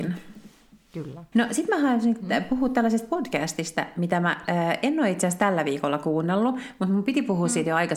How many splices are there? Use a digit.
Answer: 1